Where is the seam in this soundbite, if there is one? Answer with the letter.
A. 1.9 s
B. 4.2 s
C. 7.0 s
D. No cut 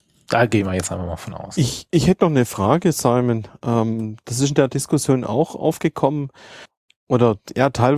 D